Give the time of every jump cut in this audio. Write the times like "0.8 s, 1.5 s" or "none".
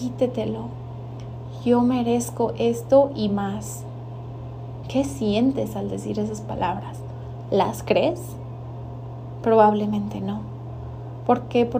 4.8 s